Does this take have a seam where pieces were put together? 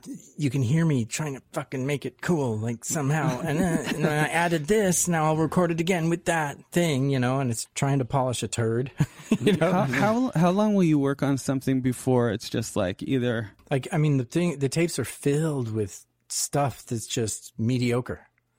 yes; 2 cuts; at 7.7 s, 13.6 s

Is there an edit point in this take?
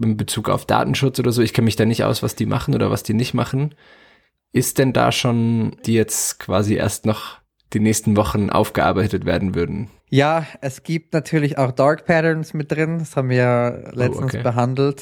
yes; 2 cuts; at 5.8 s, 10.0 s

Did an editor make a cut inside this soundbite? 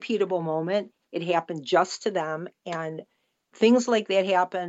no; 0 cuts

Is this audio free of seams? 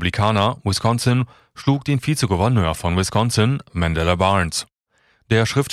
yes; 0 cuts

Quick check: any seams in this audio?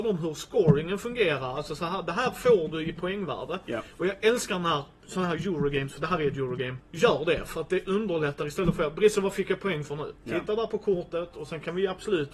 yes; 1 cut; at 6.8 s

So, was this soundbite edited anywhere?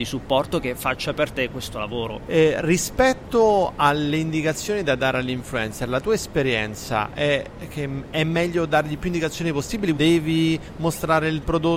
yes; 2 cuts; at 2.3 s, 9.9 s

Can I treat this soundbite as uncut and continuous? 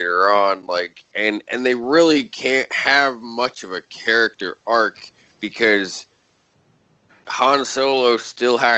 yes; 0 cuts

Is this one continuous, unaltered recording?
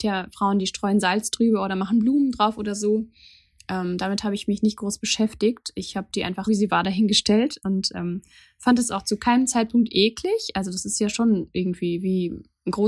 no; 1 cut; at 6.5 s

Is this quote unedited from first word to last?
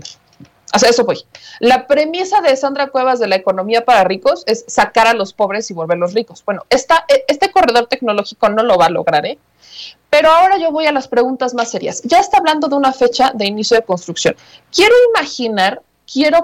yes; 0 cuts

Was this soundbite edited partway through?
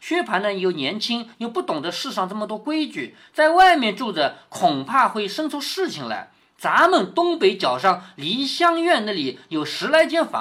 no; 0 cuts

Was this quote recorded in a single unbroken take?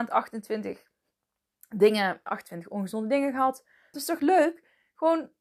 no; 2 cuts; at 2.3 s, 3.9 s

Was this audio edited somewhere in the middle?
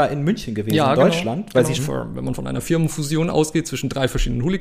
yes; 1 cut; at 1.8 s

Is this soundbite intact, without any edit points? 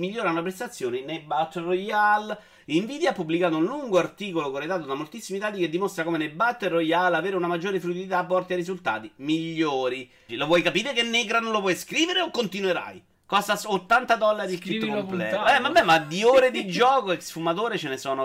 no; 2 cuts; at 10.3 s, 13.1 s

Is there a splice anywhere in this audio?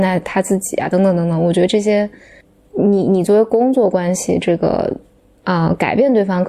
no; 0 cuts

